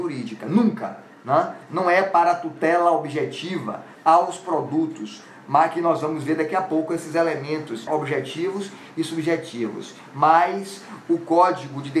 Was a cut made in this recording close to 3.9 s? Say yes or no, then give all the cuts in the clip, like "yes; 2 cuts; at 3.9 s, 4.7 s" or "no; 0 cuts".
yes; 2 cuts; at 3.9 s, 7.9 s